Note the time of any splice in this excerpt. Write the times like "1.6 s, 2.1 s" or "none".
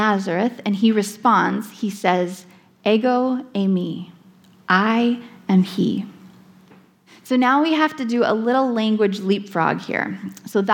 7.1 s